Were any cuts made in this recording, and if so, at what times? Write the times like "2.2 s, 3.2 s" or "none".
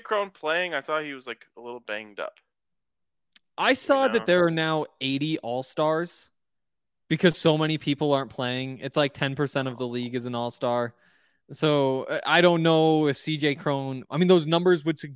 none